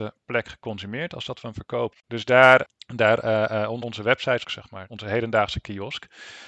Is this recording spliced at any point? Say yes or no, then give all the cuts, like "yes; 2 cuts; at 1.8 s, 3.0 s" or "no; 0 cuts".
yes; 2 cuts; at 1.9 s, 4.4 s